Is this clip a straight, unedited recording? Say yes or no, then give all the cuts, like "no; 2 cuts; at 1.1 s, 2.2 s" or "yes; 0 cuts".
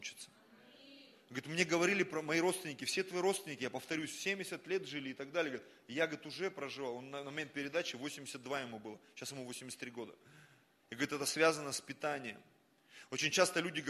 no; 1 cut; at 10.8 s